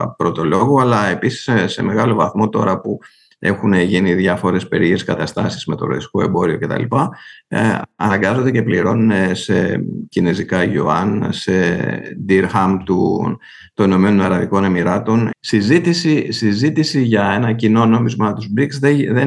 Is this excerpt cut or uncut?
cut